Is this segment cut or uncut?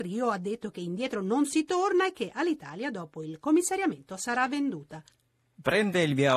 uncut